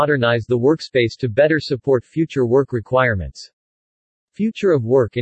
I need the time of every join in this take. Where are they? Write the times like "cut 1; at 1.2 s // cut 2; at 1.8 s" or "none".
cut 1; at 4.2 s